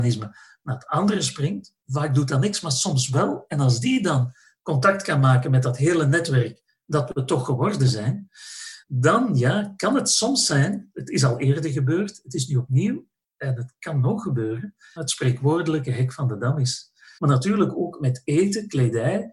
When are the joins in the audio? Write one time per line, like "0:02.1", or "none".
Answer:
0:15.0
0:17.2